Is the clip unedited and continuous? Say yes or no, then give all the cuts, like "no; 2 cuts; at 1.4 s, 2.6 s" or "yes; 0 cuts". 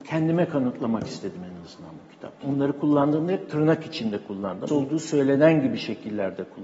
no; 2 cuts; at 2.4 s, 4.7 s